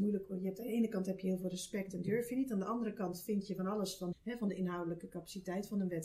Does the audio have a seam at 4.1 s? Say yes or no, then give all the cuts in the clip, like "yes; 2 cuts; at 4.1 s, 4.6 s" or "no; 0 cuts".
yes; 1 cut; at 4.1 s